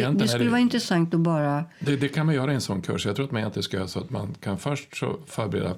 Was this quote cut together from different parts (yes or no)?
no